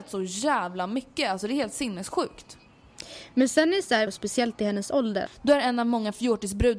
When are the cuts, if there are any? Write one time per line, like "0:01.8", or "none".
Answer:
0:04.1
0:05.3